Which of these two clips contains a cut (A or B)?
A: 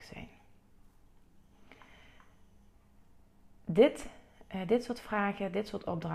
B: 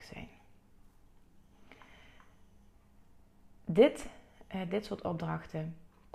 B